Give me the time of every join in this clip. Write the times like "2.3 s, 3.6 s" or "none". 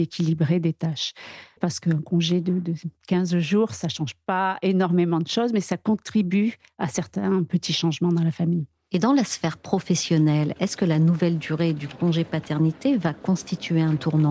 1.6 s